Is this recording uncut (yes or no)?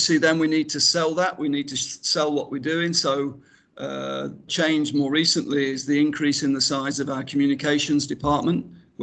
no